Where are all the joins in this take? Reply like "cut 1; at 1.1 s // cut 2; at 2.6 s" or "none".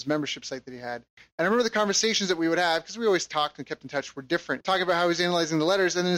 cut 1; at 4.6 s